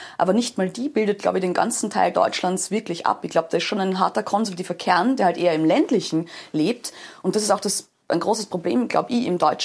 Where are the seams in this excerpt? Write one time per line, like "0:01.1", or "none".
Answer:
none